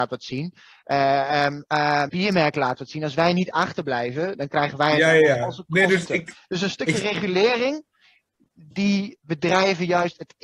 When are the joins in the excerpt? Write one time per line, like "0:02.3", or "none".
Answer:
0:02.1
0:06.1